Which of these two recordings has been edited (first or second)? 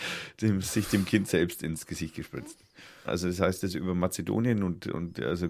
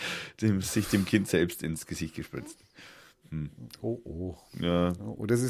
first